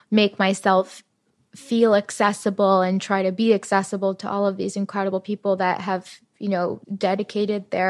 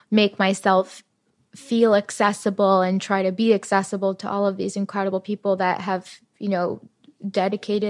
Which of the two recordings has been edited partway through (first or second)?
first